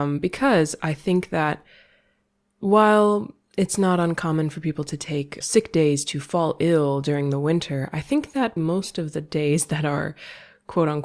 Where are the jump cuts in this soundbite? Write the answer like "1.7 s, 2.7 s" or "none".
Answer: 5.4 s, 8.6 s